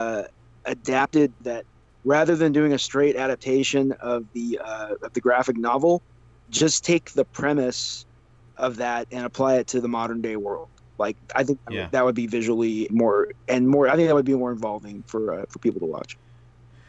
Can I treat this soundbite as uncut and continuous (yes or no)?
no